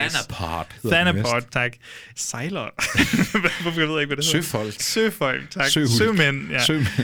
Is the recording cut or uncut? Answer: cut